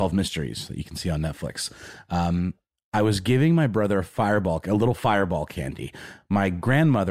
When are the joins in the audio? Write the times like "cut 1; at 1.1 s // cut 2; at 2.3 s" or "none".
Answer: none